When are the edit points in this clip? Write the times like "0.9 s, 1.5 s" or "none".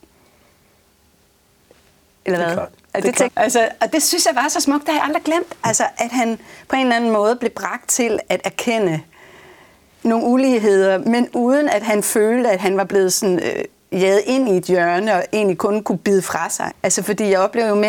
3.3 s, 16.7 s